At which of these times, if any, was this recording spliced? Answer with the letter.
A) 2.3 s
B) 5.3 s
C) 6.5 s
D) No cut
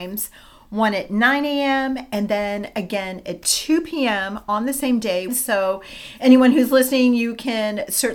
B